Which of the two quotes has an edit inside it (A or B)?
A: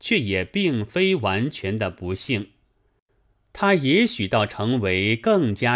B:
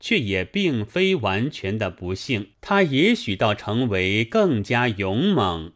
B